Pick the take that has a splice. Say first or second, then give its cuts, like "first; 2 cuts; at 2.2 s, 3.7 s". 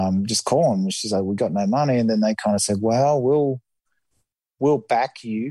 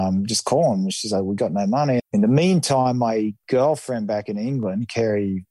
second; 1 cut; at 2.0 s